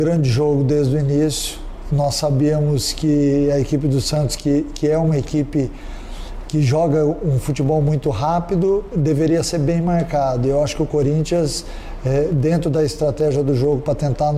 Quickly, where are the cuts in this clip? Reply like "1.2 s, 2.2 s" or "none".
none